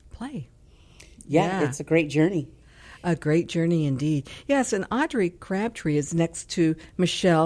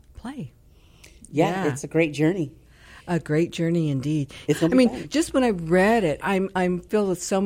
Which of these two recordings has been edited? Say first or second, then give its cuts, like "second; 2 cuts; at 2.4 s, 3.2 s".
second; 2 cuts; at 4.5 s, 6.2 s